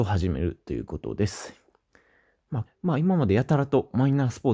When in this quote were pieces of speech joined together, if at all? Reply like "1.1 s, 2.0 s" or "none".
2.7 s